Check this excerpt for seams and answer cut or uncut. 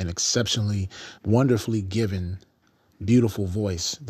cut